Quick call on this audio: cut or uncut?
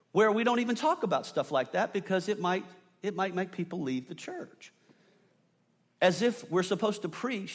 uncut